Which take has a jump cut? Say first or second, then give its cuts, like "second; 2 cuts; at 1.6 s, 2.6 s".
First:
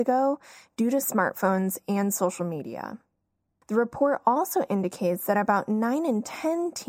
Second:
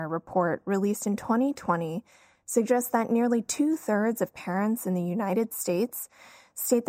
first; 1 cut; at 3.6 s